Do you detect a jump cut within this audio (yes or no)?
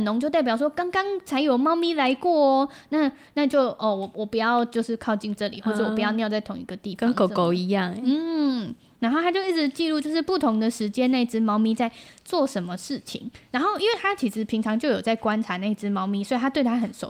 no